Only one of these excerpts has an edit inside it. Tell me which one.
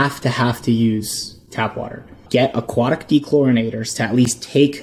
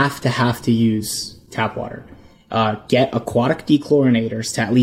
first; 1 cut; at 2.3 s

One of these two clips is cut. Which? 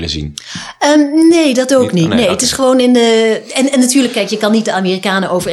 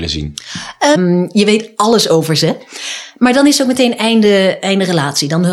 second; 1 cut; at 1.0 s

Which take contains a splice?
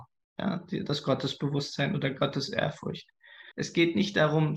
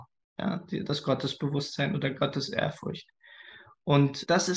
first; 1 cut; at 3.5 s

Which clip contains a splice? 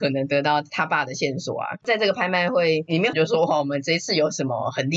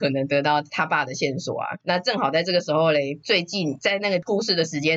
first; 2 cuts; at 1.8 s, 3.1 s

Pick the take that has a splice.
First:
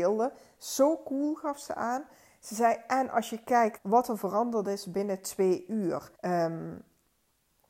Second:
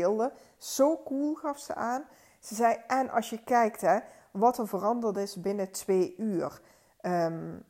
first; 2 cuts; at 3.8 s, 6.1 s

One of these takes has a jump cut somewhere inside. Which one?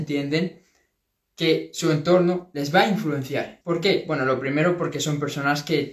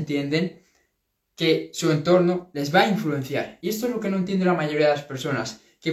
first; 1 cut; at 3.6 s

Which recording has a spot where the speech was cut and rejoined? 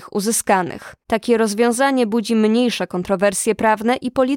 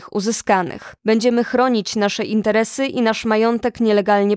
second; 1 cut; at 1.0 s

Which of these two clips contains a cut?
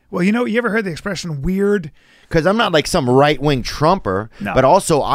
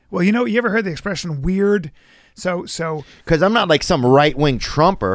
first; 1 cut; at 2.2 s

